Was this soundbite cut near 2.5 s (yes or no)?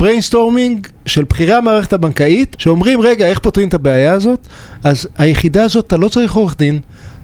yes